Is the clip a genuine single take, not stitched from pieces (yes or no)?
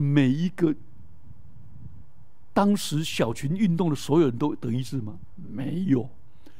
yes